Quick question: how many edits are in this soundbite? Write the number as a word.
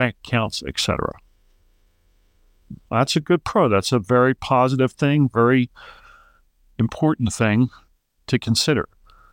zero